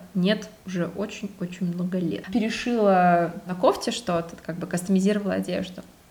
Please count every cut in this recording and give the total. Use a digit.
1